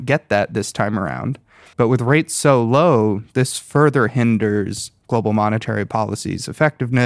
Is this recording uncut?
no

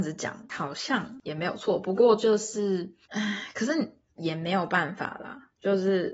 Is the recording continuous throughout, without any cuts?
yes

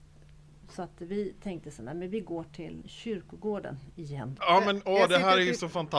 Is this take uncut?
no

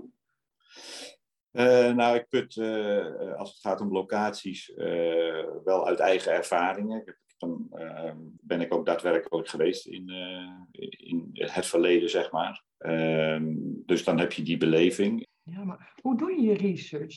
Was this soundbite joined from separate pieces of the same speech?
yes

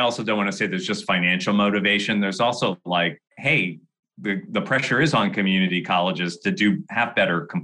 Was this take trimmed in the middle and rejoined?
yes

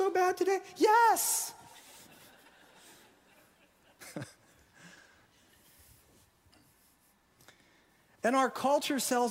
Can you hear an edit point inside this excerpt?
no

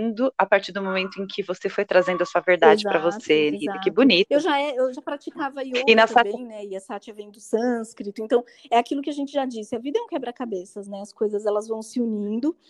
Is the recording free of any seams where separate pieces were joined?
no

